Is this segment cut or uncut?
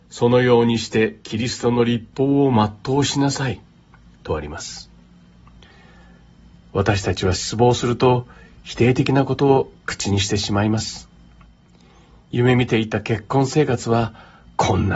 uncut